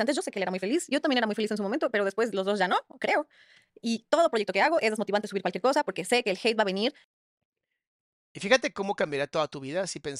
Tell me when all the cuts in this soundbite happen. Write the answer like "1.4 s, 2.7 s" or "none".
none